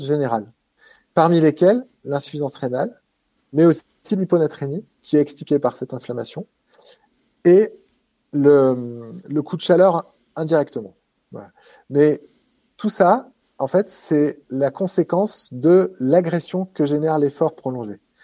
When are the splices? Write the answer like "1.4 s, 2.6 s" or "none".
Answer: none